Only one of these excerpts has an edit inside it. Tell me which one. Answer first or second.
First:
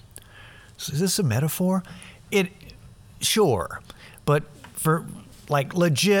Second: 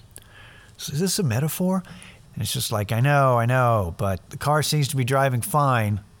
second